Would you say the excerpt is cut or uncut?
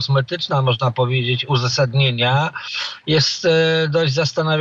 uncut